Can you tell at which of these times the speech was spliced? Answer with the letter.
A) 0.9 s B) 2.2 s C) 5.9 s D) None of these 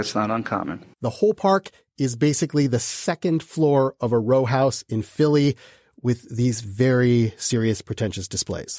A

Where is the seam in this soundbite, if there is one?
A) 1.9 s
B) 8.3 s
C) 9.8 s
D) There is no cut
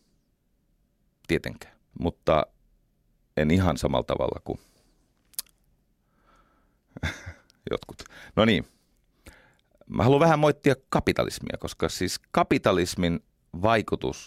A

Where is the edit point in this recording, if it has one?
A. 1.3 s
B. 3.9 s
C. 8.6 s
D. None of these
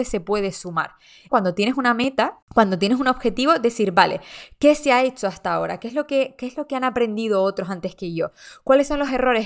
A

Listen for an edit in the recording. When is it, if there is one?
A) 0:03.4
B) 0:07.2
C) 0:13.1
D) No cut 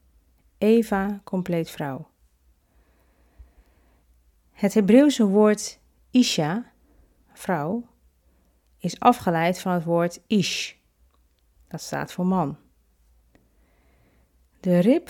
D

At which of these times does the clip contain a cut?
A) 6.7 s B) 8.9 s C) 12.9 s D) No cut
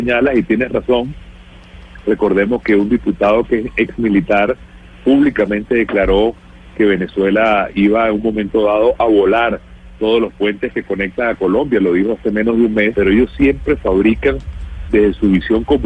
C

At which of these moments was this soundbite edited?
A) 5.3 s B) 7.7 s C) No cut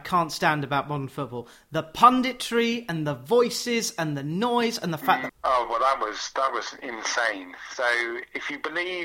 A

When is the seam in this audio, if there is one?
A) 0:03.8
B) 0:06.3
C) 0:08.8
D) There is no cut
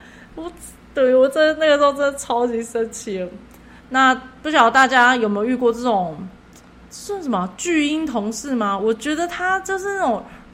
A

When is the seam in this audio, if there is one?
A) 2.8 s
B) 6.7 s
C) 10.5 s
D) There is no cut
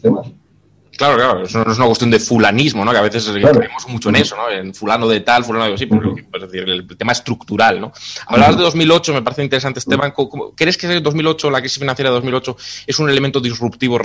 D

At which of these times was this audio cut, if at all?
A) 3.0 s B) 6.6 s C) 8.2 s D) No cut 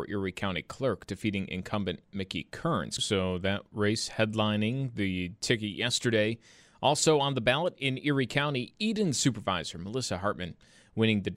A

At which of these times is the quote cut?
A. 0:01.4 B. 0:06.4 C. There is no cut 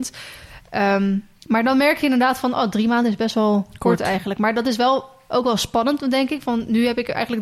A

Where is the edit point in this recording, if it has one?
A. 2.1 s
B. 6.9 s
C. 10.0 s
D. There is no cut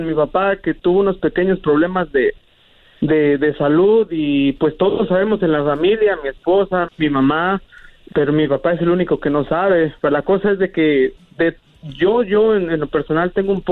B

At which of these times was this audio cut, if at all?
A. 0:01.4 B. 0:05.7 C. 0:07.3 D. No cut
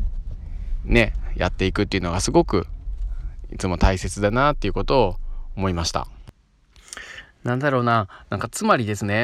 D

